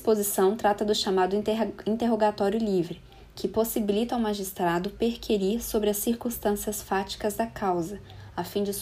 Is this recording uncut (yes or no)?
yes